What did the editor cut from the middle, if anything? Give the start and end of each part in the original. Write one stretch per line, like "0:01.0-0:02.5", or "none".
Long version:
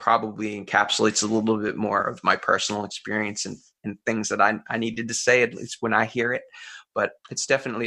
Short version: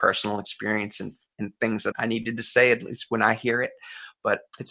0:04.4-0:04.6